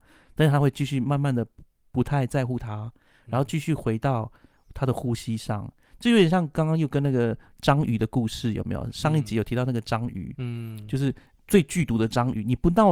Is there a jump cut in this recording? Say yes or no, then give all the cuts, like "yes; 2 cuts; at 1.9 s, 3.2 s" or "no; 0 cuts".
no; 0 cuts